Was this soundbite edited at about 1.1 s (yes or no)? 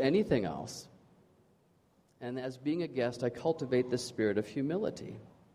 no